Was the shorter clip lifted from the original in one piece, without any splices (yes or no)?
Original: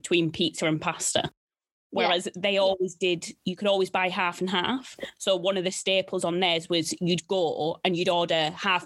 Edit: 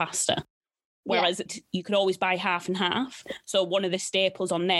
no